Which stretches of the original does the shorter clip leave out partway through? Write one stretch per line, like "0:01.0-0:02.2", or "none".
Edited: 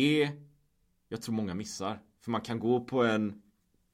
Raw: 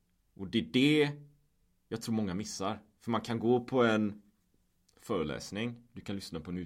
none